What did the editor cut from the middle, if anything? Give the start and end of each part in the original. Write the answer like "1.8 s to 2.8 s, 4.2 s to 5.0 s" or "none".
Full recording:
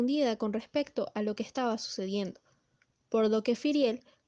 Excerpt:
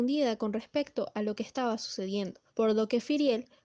2.5 s to 3.0 s